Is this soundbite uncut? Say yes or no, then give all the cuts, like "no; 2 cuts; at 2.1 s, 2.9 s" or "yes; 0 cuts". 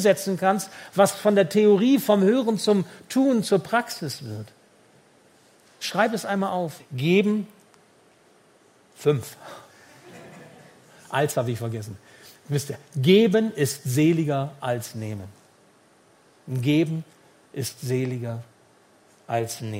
no; 1 cut; at 6.8 s